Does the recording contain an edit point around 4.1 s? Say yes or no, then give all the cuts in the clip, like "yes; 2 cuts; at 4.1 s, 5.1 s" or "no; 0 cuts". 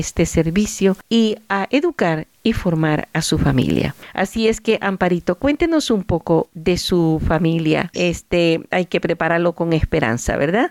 no; 1 cut; at 7.9 s